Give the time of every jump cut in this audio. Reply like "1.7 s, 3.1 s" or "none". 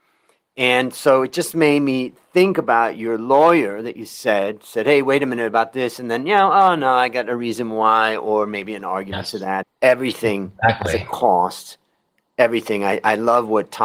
9.6 s